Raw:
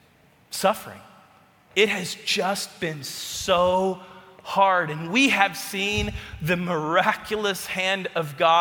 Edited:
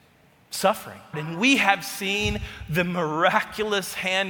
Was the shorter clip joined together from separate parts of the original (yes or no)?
yes